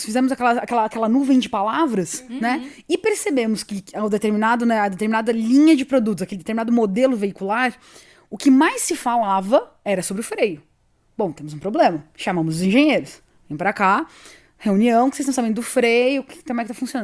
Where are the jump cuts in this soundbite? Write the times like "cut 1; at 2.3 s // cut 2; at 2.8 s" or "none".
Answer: none